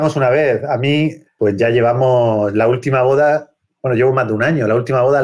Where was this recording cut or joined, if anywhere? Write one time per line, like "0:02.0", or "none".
0:01.2

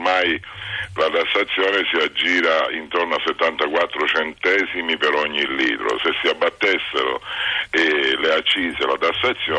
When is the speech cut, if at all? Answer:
none

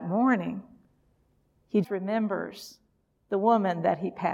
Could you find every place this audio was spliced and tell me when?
0:01.8

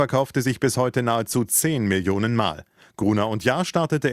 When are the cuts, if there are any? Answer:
none

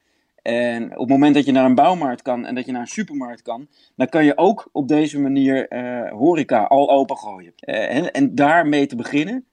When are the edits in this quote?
0:07.6

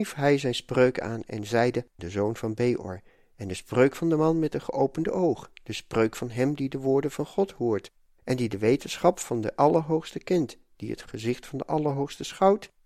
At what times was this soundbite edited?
0:02.0

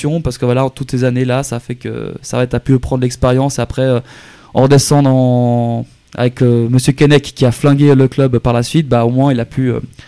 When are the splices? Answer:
none

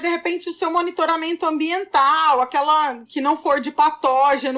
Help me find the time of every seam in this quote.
0:03.1

